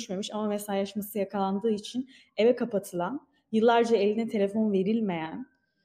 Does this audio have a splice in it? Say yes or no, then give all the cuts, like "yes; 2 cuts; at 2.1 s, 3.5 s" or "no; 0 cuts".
no; 0 cuts